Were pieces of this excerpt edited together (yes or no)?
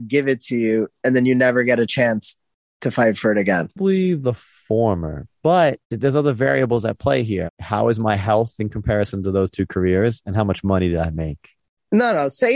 yes